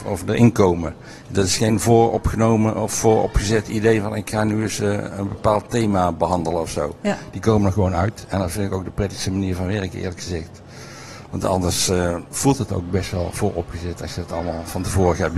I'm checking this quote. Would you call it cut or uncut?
uncut